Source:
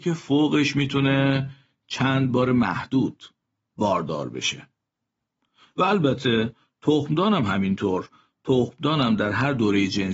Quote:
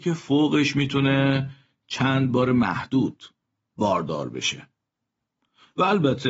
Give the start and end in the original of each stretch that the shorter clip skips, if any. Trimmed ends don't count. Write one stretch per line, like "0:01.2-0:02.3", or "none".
none